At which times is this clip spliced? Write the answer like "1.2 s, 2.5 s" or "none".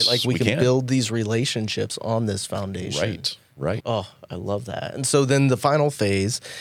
3.8 s